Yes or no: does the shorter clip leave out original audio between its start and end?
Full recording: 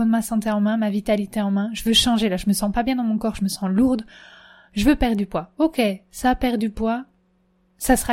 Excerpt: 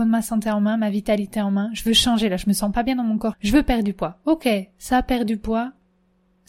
yes